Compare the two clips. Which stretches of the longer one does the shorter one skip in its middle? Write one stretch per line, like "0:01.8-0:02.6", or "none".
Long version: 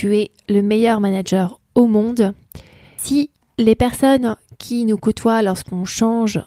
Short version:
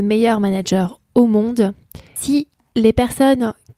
0:02.7-0:02.9